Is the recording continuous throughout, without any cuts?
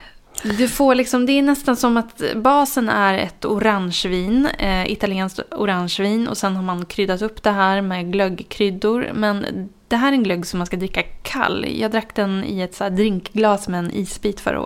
yes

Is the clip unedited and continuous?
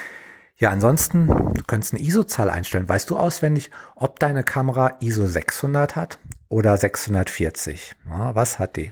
yes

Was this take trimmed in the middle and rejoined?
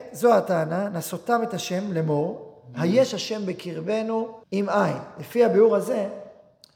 yes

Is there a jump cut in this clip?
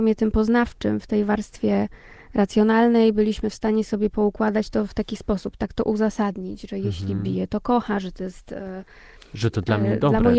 no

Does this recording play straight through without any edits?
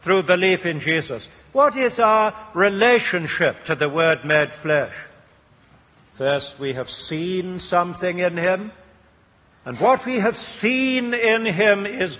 no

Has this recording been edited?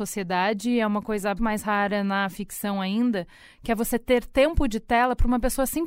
yes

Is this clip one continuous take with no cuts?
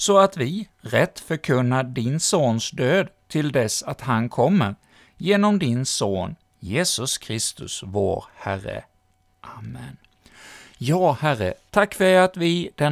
yes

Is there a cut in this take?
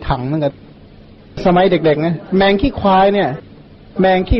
no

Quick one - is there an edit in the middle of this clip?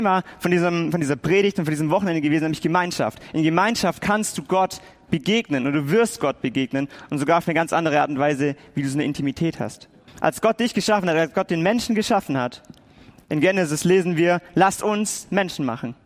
yes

